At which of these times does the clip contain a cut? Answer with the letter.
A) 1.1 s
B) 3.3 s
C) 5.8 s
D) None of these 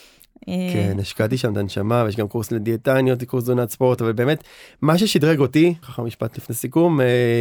C